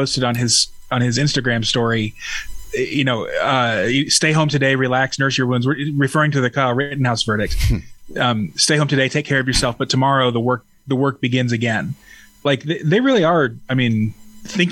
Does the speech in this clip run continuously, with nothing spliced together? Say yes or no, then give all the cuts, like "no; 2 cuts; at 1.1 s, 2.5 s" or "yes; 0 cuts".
yes; 0 cuts